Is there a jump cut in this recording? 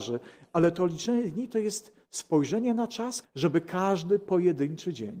yes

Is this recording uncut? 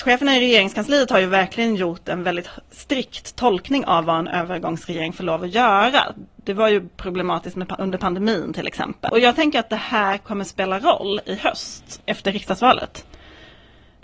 no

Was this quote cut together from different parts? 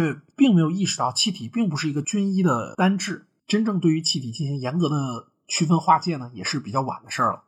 yes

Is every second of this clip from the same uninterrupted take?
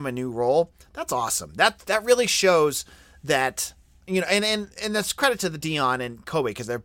yes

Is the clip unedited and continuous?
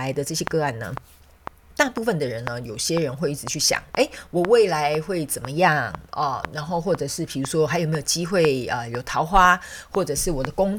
yes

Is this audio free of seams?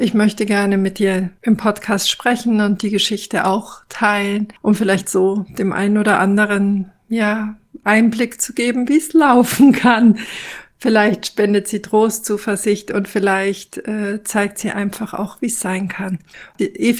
yes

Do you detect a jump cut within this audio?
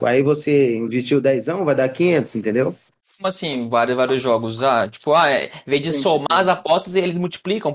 no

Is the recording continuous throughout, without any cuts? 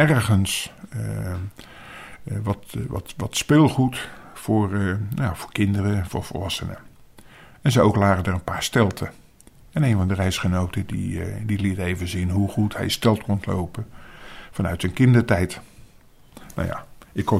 yes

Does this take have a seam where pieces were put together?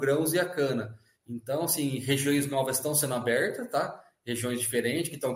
no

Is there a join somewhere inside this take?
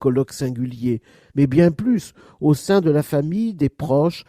yes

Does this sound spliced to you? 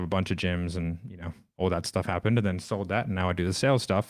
no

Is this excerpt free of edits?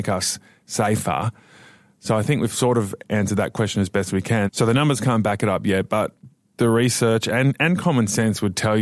no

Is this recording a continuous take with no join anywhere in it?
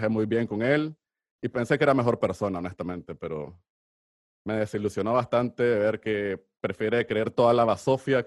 yes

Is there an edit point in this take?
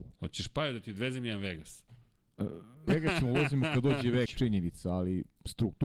yes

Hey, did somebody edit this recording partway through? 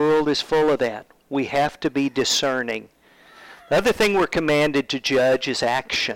no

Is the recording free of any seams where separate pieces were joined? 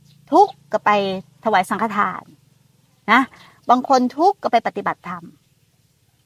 yes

